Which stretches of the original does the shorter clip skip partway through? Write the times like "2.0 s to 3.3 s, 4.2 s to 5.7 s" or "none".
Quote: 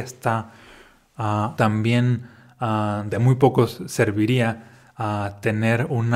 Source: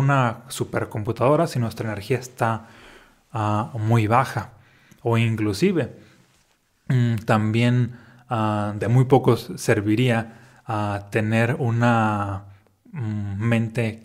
3.7 s to 7.3 s